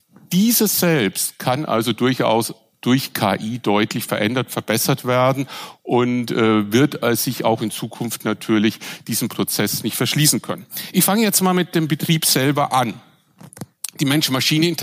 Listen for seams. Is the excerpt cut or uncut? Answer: uncut